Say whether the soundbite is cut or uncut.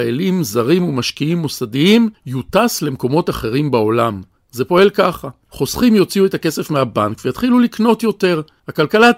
cut